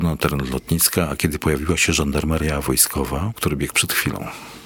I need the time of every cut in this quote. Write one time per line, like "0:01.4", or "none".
0:03.4